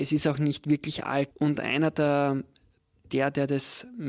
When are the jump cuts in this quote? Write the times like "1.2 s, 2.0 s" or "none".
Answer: 1.3 s